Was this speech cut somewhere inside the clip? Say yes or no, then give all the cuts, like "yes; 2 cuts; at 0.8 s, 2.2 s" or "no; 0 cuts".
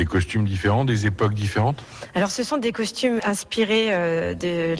yes; 1 cut; at 3.2 s